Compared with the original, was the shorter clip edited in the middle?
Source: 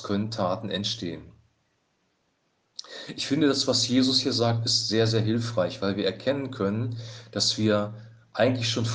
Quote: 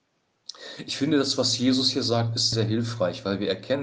yes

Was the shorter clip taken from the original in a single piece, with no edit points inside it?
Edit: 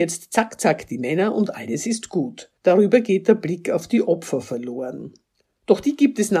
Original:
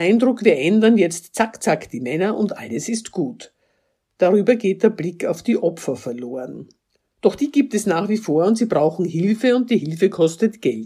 no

